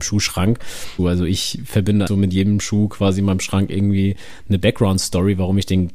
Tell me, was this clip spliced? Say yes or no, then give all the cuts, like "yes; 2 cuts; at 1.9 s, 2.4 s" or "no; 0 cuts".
yes; 2 cuts; at 1.0 s, 2.1 s